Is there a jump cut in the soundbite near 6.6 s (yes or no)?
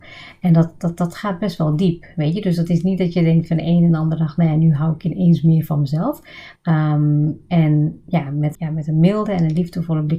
yes